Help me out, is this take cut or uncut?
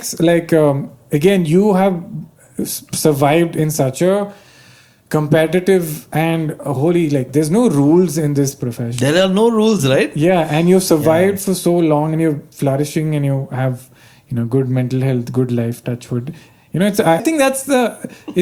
cut